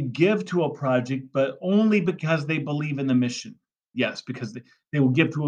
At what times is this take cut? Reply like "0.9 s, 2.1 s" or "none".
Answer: 3.9 s